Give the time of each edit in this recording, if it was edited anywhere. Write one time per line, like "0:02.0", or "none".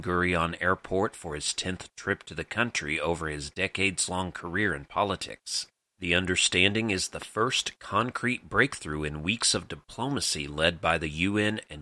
0:05.8